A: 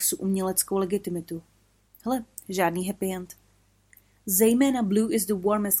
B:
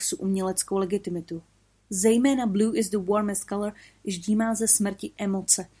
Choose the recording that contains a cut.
B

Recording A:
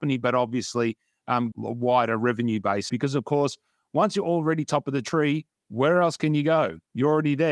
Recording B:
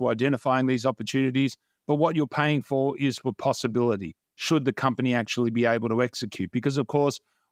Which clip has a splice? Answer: A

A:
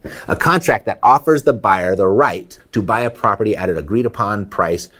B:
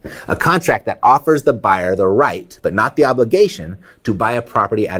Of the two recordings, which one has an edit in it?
A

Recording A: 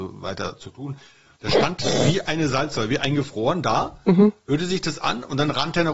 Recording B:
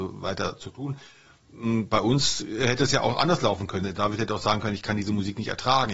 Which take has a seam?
A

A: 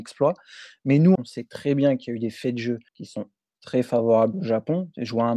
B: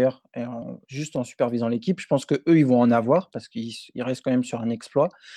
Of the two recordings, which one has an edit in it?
A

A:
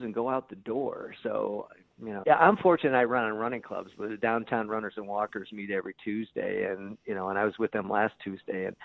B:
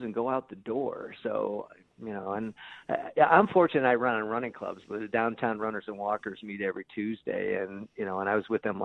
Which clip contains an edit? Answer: A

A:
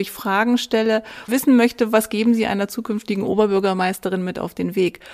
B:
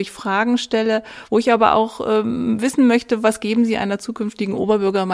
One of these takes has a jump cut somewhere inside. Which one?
A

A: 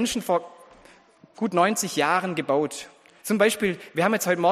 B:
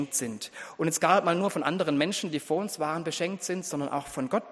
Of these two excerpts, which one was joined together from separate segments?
A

